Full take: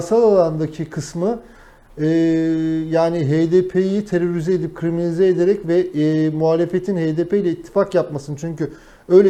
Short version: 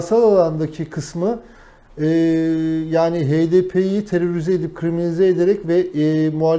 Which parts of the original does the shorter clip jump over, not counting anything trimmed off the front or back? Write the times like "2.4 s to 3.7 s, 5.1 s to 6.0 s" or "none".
none